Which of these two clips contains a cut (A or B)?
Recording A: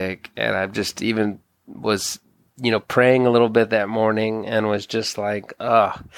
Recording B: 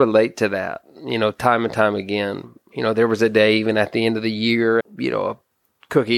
B